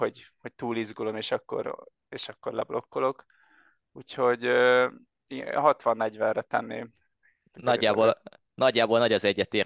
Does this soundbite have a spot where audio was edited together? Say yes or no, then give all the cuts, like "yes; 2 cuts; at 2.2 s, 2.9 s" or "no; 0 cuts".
no; 0 cuts